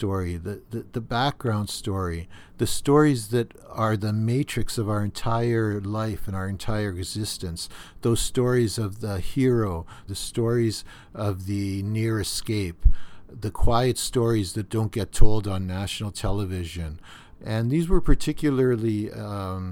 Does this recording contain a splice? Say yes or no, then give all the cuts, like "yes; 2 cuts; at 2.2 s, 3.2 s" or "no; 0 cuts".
yes; 2 cuts; at 10.1 s, 17.3 s